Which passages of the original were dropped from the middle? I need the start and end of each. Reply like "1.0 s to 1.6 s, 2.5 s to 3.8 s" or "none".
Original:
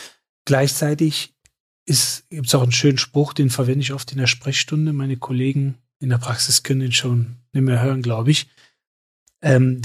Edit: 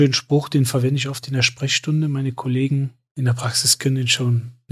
none